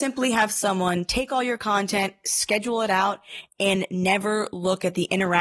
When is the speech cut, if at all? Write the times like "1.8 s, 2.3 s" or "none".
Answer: none